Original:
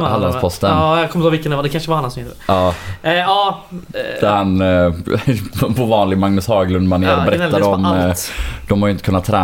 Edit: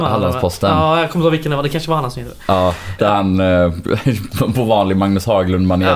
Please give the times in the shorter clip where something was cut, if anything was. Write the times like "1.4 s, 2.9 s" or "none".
3.0 s